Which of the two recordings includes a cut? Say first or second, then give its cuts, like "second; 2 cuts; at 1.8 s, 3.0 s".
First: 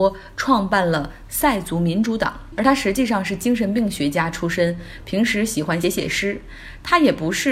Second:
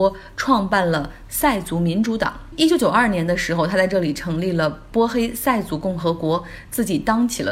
first; 2 cuts; at 2.6 s, 5.8 s